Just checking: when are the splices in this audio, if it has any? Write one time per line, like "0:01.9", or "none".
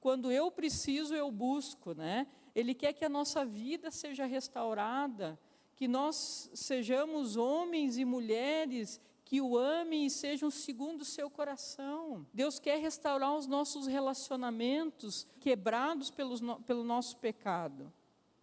0:02.5
0:12.3
0:15.4

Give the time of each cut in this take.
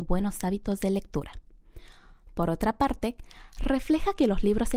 none

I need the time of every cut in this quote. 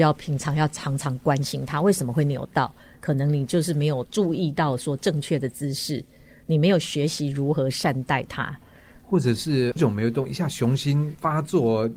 0:09.8

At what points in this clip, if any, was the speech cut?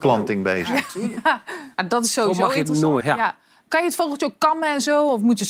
0:03.0

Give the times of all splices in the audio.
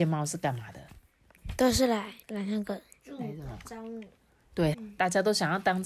0:02.2
0:04.7

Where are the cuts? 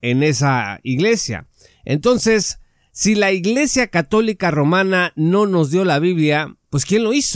none

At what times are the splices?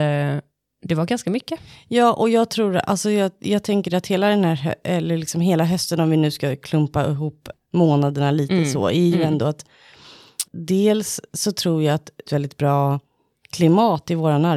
0:10.5
0:12.3

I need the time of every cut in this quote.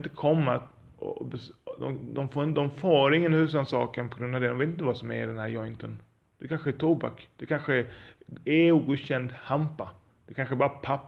none

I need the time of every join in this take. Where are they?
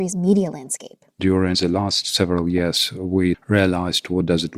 0:03.3

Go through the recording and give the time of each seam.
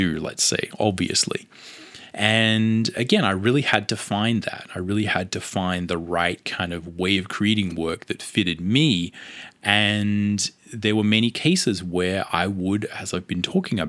none

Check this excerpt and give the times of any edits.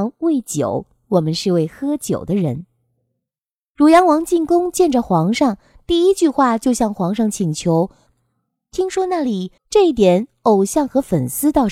0:08.1
0:09.6

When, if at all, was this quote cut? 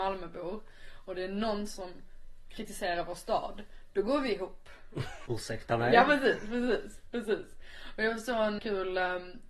0:05.3
0:08.6

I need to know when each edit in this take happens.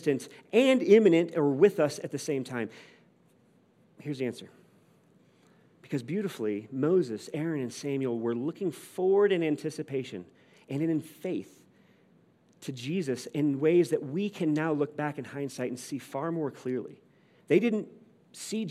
none

